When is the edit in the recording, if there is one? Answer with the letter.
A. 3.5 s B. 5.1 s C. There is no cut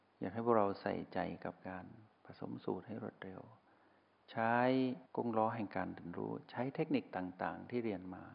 B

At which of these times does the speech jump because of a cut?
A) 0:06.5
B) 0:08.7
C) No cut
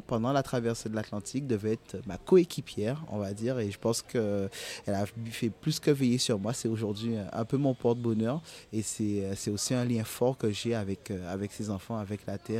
C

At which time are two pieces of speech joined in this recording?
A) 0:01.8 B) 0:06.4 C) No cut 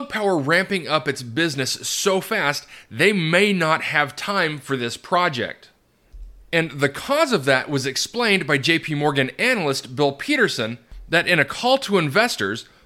B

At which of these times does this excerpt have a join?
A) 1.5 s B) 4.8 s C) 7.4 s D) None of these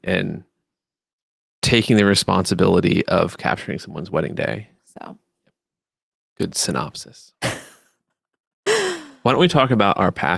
B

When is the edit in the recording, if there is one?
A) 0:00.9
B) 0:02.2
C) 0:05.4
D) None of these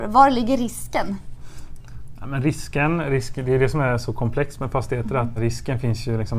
C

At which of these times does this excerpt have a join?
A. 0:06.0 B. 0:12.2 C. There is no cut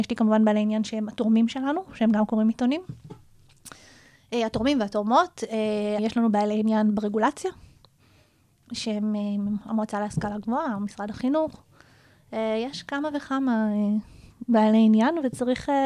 A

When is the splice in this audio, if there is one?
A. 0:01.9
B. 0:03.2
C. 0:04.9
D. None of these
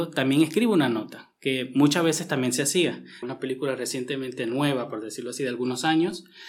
B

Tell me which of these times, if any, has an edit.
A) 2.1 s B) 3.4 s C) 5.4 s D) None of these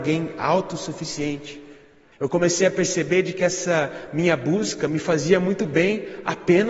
A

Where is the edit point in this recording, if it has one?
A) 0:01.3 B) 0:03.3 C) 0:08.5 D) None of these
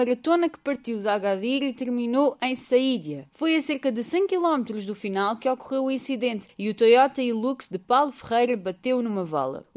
B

